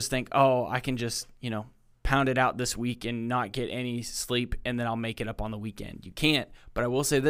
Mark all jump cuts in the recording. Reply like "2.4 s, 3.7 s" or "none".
none

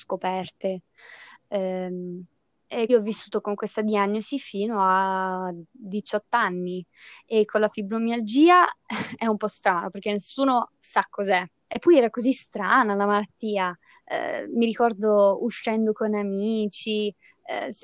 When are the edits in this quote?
2.9 s, 11.7 s

